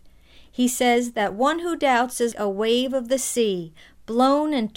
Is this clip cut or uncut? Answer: cut